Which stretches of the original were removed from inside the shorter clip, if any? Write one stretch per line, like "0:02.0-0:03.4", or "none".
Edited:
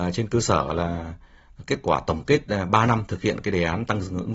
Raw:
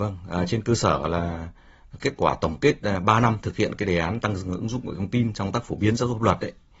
none

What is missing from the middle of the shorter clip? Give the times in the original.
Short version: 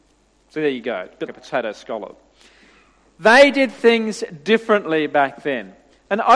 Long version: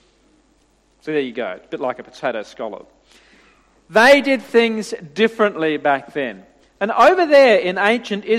0:01.8-0:02.0

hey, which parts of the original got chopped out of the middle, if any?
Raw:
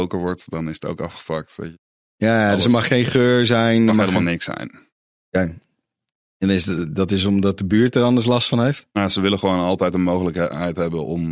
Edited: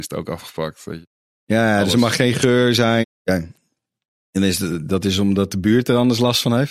0:03.7-0:05.1

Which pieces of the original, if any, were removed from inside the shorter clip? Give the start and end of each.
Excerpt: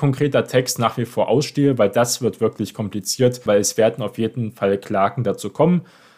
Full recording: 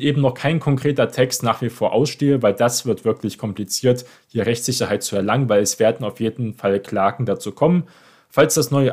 0:04.1-0:05.5

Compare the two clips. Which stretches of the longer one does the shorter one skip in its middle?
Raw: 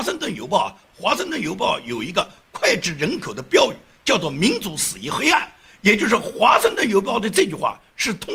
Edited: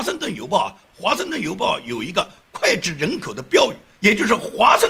0:04.0-0:05.8

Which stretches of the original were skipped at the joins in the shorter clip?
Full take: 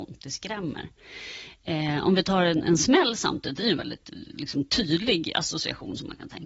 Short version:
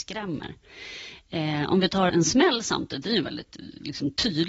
0:02.4-0:02.6

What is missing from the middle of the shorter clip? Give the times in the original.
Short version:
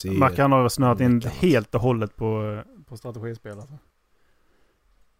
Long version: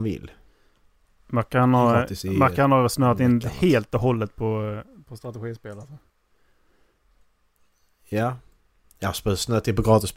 none

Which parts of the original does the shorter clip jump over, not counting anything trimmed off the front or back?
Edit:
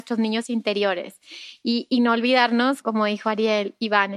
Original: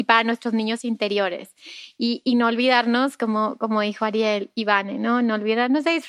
0:03.2-0:03.6

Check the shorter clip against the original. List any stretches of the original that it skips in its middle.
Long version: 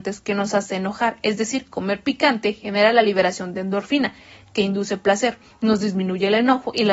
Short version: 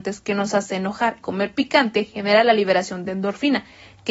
0:01.2-0:01.7

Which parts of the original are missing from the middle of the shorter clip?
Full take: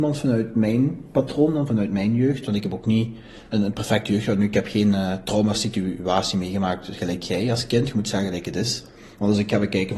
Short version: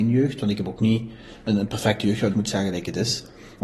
0:04.4-0:07.9

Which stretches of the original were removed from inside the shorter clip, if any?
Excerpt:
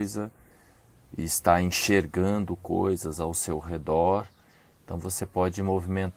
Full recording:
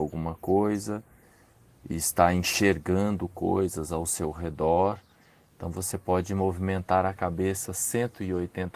none

